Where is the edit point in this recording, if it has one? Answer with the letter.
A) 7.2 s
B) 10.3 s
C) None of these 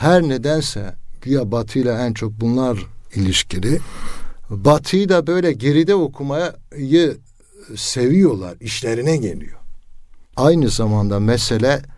B